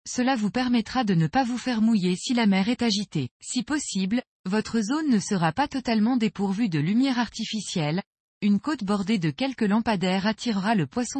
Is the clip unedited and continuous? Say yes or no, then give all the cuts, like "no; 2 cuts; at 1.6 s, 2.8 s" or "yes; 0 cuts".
no; 1 cut; at 3.3 s